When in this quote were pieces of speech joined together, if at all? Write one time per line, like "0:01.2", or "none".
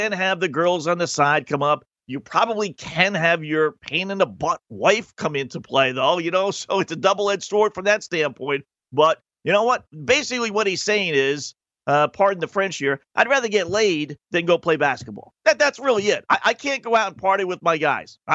none

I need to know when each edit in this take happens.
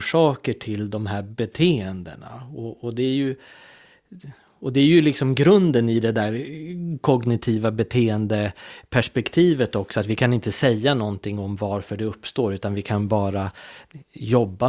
none

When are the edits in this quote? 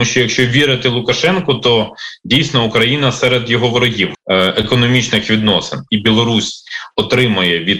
0:04.1
0:05.9

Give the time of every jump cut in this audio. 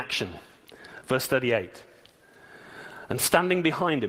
none

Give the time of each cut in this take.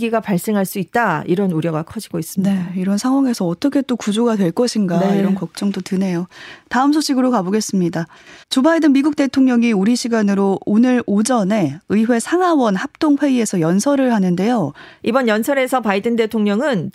0:08.4
0:15.0

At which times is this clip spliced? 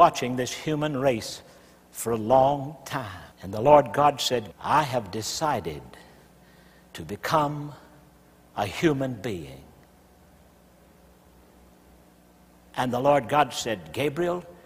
0:03.3
0:04.5

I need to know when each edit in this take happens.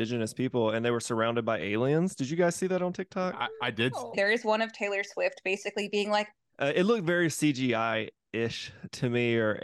0:04.1
0:06.5

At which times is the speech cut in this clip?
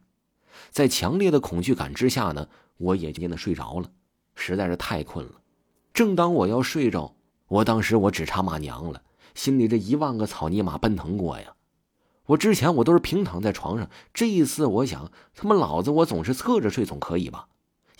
0:03.2
0:05.9
0:07.3

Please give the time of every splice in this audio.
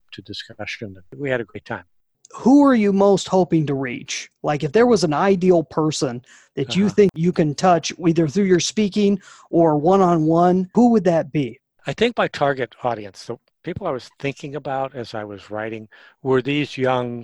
none

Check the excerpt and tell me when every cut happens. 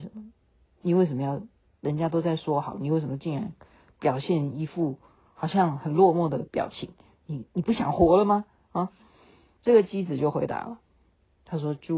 none

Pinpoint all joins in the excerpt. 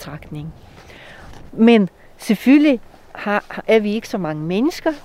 0:01.5

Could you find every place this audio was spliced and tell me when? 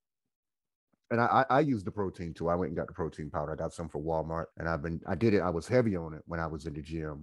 0:04.5

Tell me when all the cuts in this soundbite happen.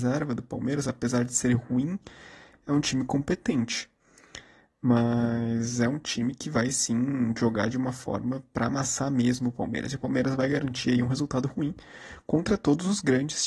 none

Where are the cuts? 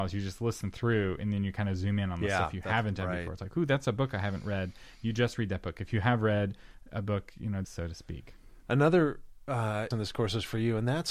0:07.6
0:09.9

